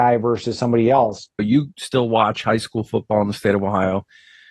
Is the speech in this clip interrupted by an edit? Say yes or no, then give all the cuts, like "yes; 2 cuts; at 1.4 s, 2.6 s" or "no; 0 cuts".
yes; 1 cut; at 1.4 s